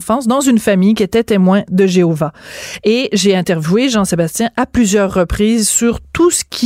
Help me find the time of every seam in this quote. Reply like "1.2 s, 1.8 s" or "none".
none